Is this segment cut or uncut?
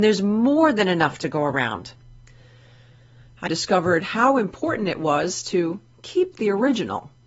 cut